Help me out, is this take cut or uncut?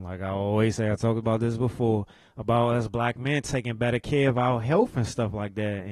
uncut